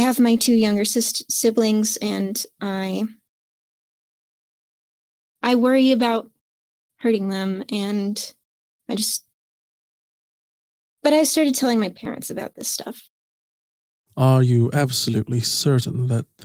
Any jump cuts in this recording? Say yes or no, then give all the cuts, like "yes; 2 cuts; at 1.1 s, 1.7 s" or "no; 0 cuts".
no; 0 cuts